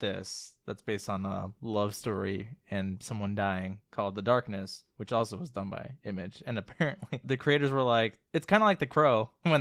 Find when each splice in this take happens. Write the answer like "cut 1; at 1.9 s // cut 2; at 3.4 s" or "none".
none